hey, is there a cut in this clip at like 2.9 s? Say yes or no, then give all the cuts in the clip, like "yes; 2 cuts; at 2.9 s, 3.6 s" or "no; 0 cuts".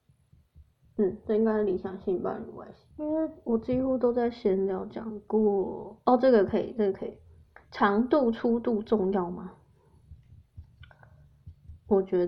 yes; 1 cut; at 2.9 s